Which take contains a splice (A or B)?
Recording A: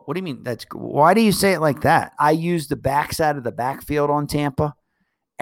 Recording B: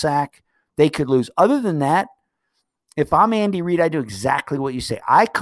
A